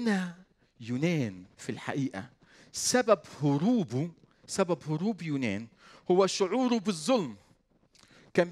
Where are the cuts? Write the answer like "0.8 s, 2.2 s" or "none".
none